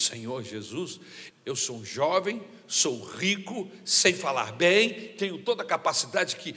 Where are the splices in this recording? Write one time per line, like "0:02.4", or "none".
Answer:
0:01.3